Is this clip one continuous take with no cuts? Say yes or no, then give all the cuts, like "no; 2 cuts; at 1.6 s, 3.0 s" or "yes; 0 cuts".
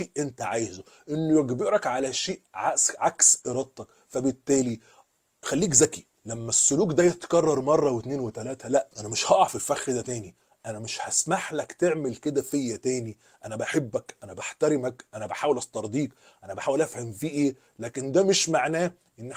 no; 2 cuts; at 6.2 s, 8.9 s